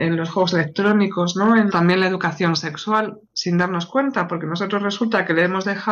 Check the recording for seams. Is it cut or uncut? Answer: cut